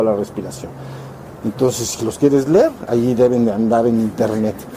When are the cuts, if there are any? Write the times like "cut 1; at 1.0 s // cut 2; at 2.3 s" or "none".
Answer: cut 1; at 1.4 s